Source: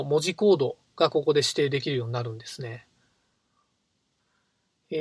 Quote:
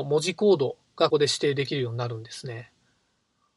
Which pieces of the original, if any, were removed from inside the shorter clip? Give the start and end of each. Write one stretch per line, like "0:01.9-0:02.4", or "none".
0:01.1-0:01.2